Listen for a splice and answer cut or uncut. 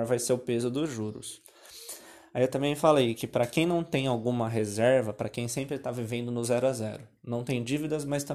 uncut